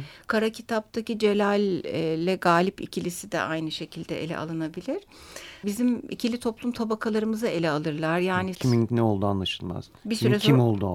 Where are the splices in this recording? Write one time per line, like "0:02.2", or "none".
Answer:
0:05.6
0:08.5